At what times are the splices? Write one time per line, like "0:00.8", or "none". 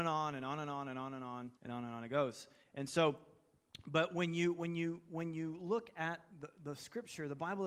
0:01.6